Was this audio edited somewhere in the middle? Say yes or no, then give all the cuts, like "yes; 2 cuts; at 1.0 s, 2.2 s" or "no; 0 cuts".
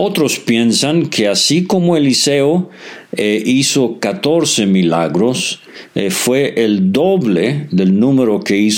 no; 0 cuts